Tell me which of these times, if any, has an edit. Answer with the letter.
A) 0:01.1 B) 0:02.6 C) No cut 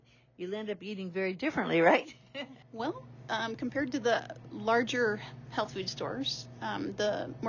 B